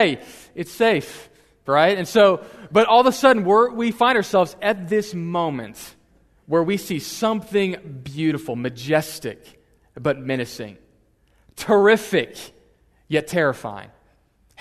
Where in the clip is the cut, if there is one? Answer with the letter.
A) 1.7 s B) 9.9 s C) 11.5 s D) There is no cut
A